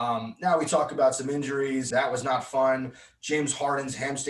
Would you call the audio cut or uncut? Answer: cut